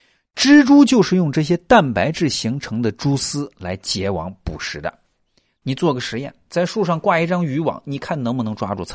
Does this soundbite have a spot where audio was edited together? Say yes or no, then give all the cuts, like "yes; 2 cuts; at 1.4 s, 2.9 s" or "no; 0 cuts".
yes; 1 cut; at 5.6 s